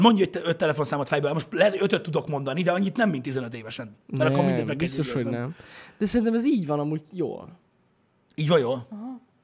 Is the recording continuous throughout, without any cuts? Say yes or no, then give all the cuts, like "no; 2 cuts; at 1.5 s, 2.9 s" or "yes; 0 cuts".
yes; 0 cuts